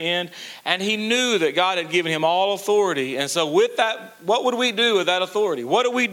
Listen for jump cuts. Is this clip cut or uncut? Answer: uncut